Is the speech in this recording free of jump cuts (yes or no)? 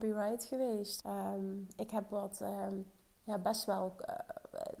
no